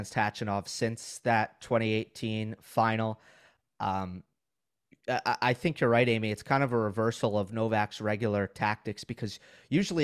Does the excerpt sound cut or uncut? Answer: uncut